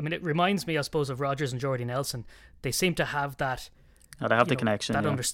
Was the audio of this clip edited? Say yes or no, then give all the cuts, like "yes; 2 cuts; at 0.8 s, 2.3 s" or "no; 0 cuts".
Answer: no; 0 cuts